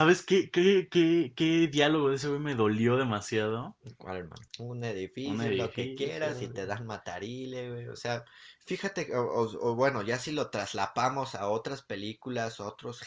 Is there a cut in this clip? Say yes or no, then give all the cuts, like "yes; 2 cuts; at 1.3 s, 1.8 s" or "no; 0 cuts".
yes; 1 cut; at 4.5 s